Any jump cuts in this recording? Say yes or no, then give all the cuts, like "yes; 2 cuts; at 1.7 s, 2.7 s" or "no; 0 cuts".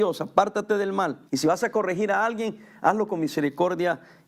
yes; 1 cut; at 1.3 s